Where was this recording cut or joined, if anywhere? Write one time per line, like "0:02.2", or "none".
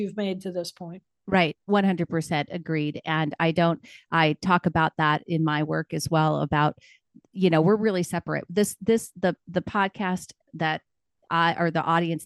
none